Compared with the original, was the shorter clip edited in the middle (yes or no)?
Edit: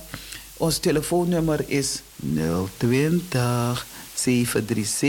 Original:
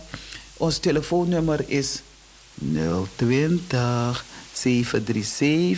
yes